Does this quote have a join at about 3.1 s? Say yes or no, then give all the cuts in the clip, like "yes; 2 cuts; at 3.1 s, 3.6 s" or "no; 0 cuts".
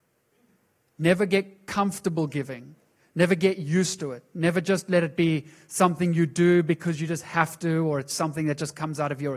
no; 0 cuts